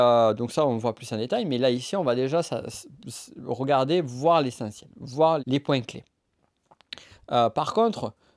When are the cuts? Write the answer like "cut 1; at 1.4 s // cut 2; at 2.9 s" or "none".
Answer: cut 1; at 5.4 s // cut 2; at 7.1 s